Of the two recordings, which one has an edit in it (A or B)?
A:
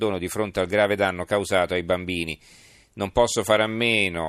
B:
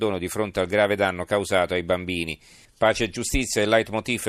B